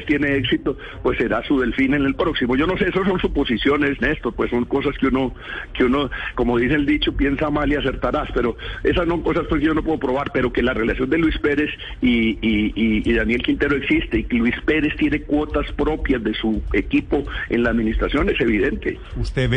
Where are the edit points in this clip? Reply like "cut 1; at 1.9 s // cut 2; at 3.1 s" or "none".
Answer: none

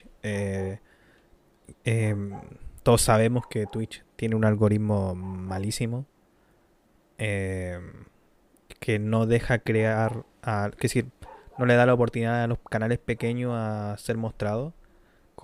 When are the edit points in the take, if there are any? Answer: none

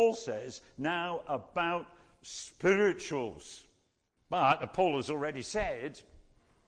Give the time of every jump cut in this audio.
cut 1; at 4.2 s

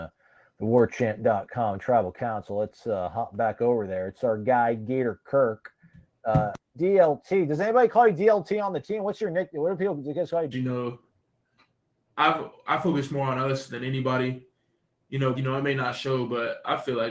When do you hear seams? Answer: cut 1; at 10.5 s // cut 2; at 15.3 s

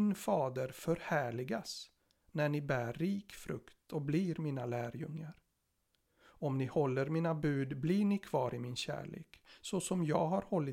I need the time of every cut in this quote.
cut 1; at 6.0 s

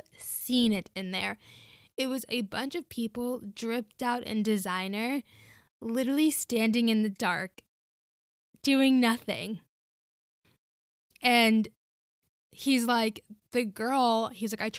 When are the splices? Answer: none

